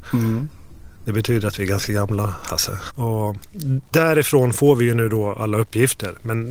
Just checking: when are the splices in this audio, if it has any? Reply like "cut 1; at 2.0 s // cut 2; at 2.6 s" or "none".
cut 1; at 2.9 s